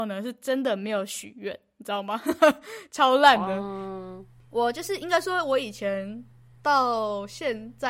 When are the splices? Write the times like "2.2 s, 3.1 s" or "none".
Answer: none